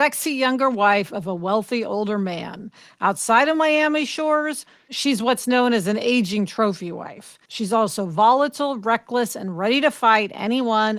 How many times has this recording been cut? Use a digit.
1